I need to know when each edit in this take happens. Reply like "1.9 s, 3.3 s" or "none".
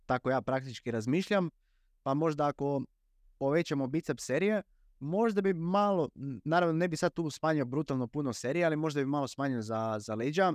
none